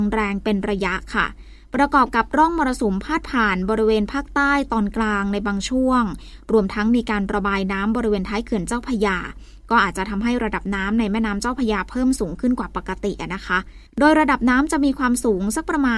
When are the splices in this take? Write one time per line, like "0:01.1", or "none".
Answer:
0:13.9

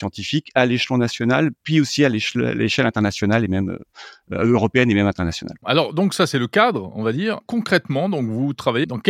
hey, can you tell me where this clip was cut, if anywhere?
none

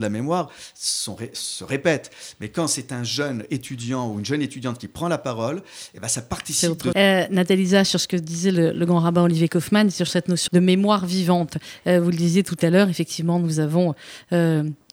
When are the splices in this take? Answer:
0:06.9
0:10.5

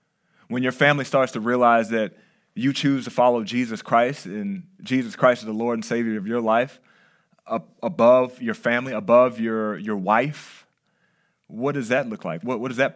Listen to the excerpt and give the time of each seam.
none

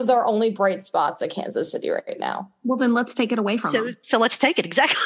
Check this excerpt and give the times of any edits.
none

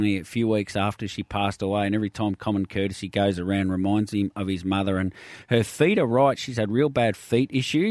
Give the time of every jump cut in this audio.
none

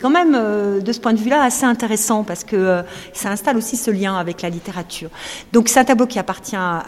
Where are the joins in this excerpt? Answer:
none

